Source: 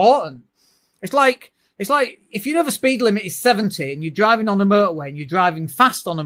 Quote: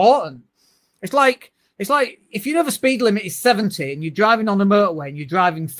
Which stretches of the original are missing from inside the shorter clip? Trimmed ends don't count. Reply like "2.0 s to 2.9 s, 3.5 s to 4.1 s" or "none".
none